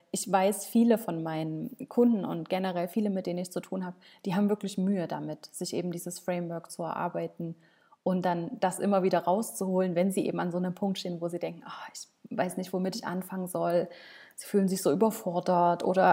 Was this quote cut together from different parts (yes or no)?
no